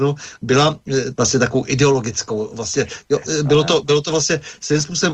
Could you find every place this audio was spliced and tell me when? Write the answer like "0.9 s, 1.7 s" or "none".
1.2 s